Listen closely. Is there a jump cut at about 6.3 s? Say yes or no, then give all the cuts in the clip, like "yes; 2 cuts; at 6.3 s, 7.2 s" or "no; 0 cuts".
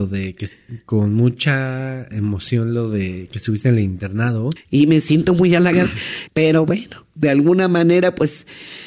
yes; 2 cuts; at 4.6 s, 6.3 s